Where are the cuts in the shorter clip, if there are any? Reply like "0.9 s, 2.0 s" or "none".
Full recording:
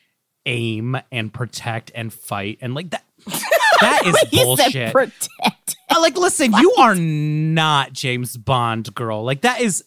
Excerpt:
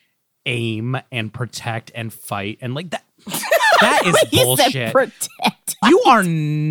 5.8 s